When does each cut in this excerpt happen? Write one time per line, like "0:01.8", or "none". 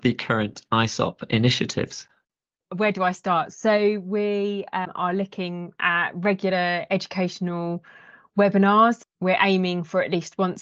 0:02.5

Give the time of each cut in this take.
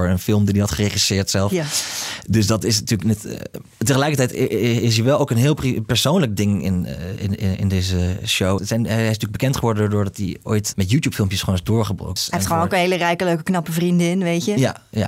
0:08.6
0:10.7
0:12.2

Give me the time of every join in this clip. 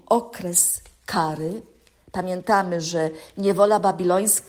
none

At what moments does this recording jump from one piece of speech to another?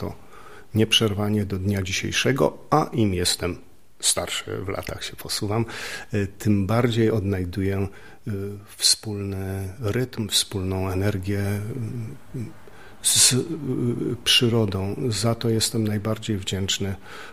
none

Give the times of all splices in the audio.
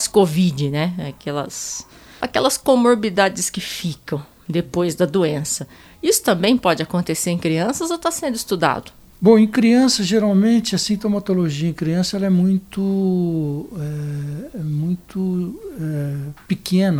0:02.2

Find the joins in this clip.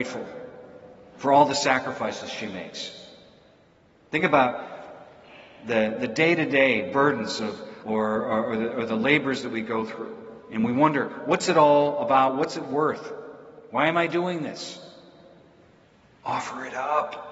0:07.8

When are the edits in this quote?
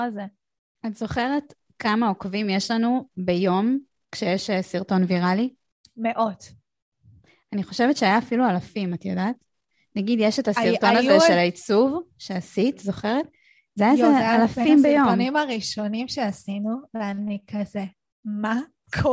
none

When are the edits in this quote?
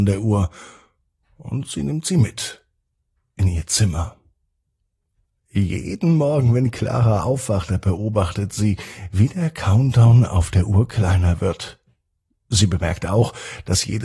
none

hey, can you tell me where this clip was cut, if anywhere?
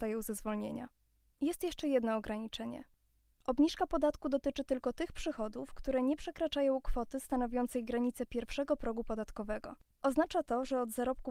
0:09.9

